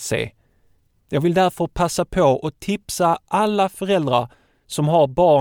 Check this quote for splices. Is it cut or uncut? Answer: cut